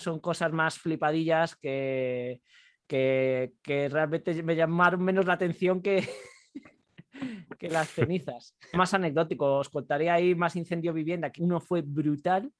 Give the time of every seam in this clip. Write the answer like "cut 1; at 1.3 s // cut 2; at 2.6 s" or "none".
cut 1; at 8.7 s // cut 2; at 11.4 s